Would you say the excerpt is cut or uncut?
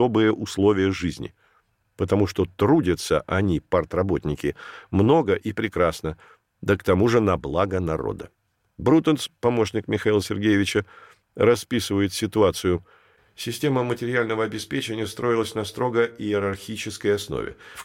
uncut